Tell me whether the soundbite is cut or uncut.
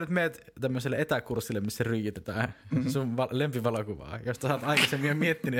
uncut